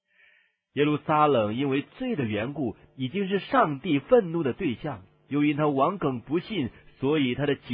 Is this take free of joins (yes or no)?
yes